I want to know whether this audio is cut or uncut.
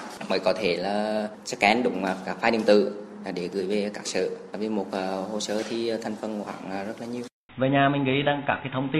cut